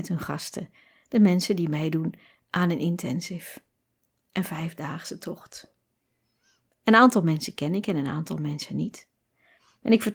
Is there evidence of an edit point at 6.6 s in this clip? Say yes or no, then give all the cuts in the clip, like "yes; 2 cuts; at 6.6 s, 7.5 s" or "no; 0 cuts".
no; 0 cuts